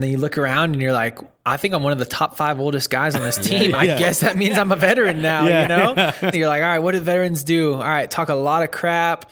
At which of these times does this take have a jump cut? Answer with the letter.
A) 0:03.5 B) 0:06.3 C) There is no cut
B